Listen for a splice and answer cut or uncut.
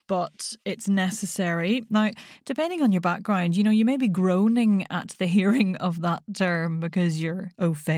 cut